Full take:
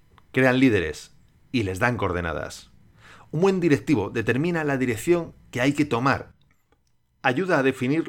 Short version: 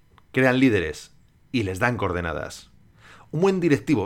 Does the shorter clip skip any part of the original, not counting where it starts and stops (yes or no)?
no